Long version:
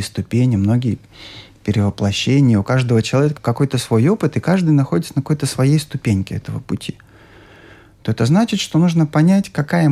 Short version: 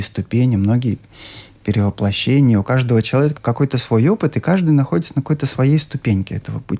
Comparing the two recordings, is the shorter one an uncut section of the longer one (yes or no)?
yes